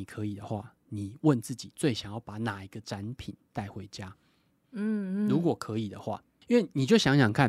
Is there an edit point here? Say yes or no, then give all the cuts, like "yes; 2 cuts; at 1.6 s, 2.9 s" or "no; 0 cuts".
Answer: no; 0 cuts